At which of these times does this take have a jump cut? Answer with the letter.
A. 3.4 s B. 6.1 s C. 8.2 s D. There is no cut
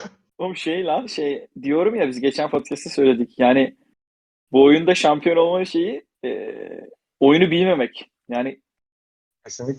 B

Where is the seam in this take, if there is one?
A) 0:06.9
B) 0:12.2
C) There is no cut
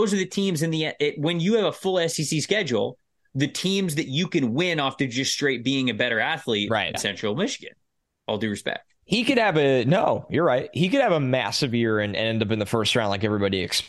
A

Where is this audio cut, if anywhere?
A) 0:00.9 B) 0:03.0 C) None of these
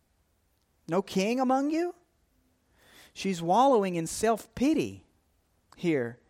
C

